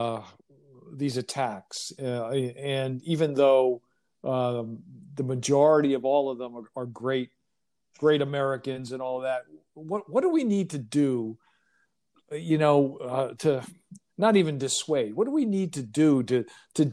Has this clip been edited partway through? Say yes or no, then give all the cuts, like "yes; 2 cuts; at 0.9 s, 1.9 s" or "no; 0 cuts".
no; 0 cuts